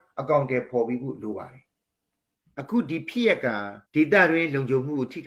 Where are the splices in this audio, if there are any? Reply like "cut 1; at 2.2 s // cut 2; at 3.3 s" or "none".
cut 1; at 3.9 s